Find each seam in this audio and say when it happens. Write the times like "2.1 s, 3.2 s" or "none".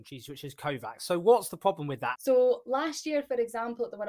2.1 s